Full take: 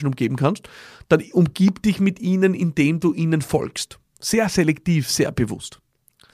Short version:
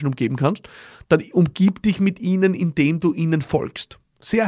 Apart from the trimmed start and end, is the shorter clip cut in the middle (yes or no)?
no